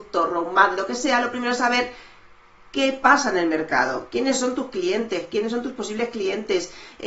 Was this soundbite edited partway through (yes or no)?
no